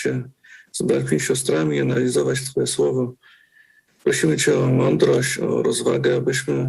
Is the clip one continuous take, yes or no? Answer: yes